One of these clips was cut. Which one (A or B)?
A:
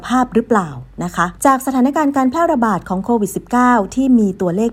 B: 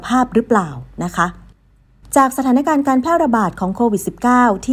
A